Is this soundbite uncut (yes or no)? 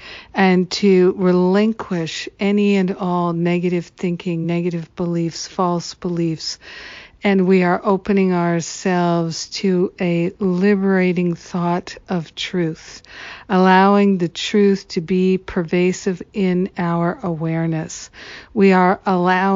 yes